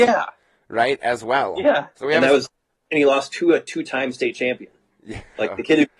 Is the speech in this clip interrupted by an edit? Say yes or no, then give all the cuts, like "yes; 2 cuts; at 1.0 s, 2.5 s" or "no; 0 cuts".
yes; 1 cut; at 1.9 s